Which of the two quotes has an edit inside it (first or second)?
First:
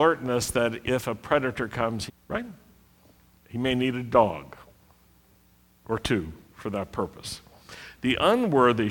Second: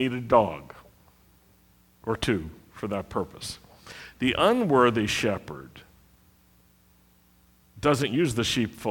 first